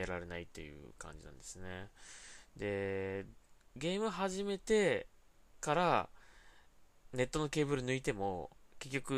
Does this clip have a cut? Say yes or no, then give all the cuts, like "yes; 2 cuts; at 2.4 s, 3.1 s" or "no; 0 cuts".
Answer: no; 0 cuts